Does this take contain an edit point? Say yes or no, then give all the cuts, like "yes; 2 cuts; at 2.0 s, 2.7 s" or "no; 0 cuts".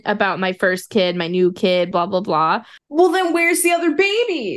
no; 0 cuts